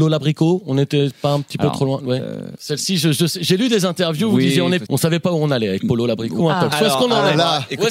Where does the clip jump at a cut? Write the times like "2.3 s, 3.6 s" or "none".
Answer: 4.9 s, 6.4 s